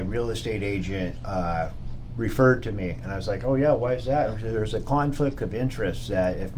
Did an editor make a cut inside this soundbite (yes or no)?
no